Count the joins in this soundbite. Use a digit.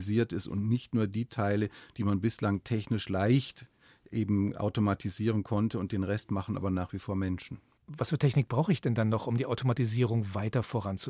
0